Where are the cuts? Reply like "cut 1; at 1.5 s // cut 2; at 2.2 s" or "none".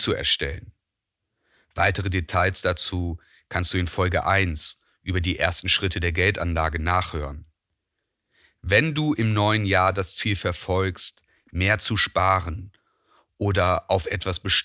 none

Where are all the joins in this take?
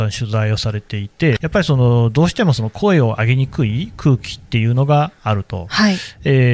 cut 1; at 1.4 s

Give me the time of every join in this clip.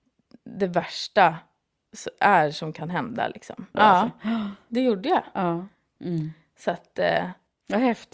cut 1; at 3.7 s // cut 2; at 6.0 s

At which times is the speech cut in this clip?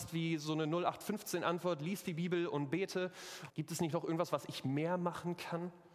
cut 1; at 3.5 s

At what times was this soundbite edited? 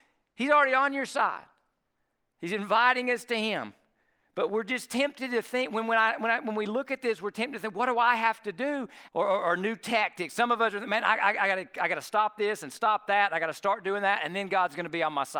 cut 1; at 9.1 s

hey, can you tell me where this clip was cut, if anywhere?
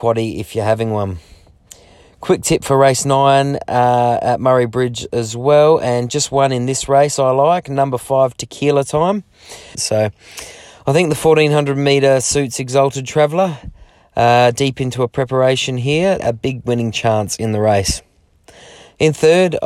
cut 1; at 9.7 s // cut 2; at 16.2 s

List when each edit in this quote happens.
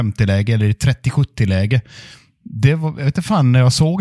none

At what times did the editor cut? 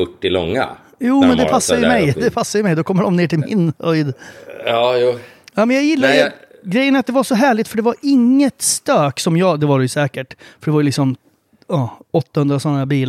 none

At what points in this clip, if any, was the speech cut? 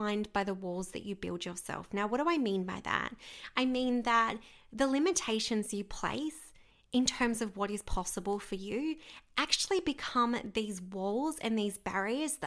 none

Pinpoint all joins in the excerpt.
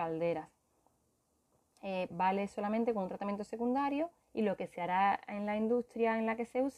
cut 1; at 2.1 s

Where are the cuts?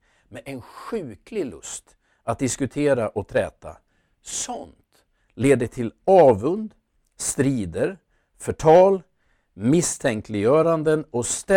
none

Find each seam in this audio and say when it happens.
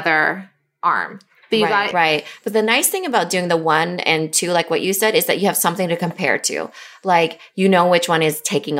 cut 1; at 1.9 s

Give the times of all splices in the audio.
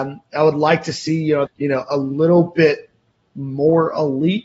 cut 1; at 1.5 s

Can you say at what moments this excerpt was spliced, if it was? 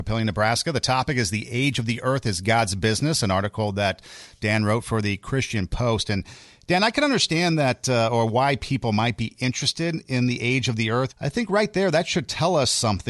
cut 1; at 11.1 s

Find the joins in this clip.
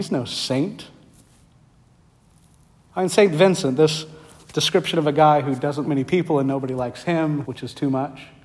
cut 1; at 5.9 s // cut 2; at 7.4 s

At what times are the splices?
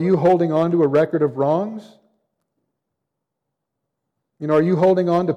none

